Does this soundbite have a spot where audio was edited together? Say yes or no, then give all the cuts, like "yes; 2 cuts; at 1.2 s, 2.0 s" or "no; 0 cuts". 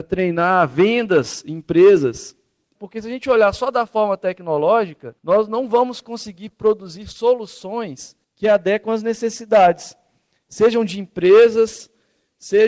yes; 3 cuts; at 2.8 s, 5.2 s, 8.2 s